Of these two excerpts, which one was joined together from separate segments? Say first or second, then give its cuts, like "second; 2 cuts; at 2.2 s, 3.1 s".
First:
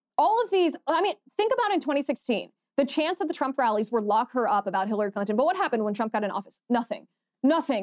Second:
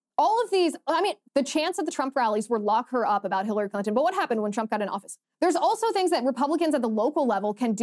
second; 2 cuts; at 1.3 s, 5.2 s